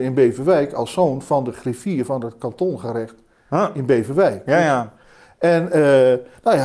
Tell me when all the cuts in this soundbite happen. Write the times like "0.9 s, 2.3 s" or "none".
none